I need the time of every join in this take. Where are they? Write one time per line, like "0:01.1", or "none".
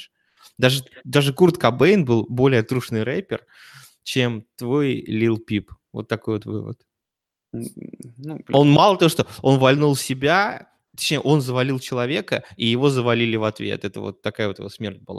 none